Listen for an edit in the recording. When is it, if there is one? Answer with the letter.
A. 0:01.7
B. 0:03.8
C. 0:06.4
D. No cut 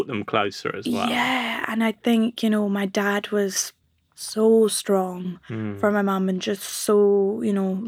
D